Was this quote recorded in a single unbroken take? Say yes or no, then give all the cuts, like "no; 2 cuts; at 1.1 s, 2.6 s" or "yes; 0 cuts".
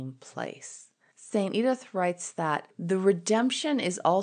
yes; 0 cuts